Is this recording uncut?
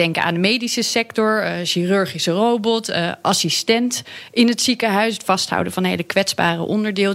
yes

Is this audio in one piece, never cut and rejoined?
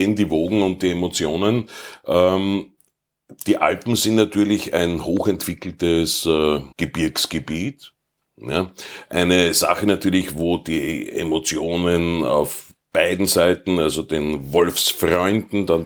no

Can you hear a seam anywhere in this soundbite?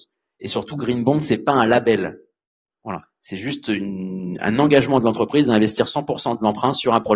no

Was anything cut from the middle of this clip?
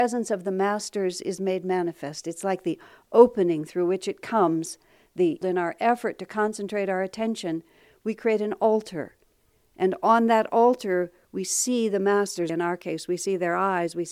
yes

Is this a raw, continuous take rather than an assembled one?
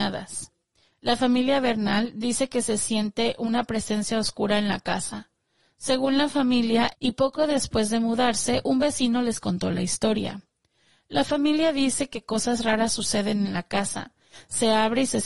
no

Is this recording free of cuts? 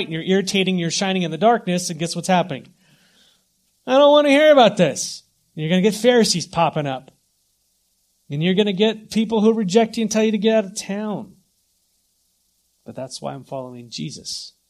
yes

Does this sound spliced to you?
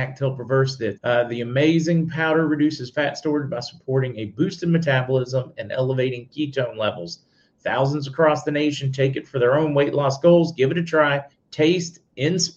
yes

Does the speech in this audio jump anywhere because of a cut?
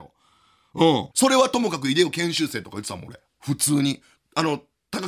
yes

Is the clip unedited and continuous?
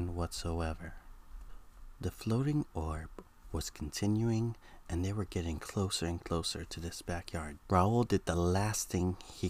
no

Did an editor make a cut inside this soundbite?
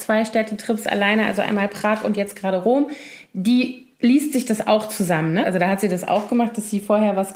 yes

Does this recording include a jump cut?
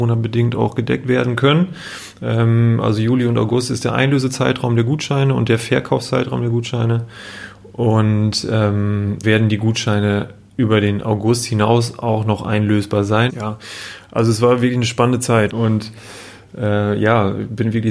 yes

